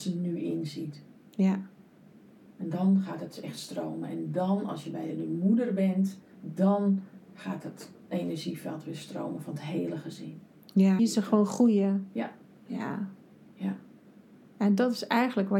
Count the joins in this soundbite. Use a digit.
2